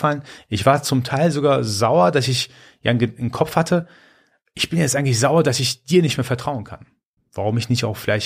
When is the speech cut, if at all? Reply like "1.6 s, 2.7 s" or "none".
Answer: 7.2 s